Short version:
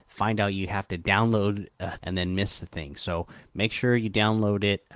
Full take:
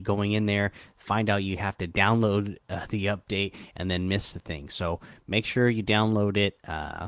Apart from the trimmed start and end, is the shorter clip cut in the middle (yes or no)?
yes